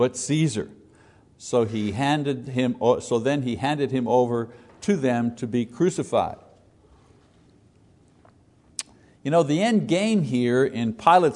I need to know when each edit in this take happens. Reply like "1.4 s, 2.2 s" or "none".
none